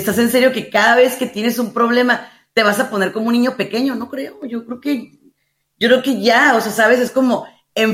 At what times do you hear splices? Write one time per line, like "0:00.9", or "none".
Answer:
none